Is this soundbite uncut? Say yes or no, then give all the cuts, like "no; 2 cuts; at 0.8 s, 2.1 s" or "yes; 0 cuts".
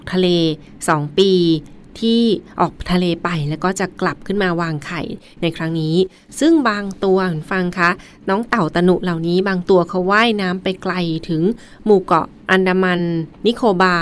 yes; 0 cuts